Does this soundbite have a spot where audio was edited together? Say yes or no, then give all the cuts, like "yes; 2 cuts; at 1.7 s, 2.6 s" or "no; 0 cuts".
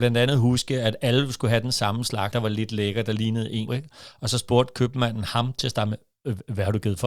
yes; 2 cuts; at 2.3 s, 3.7 s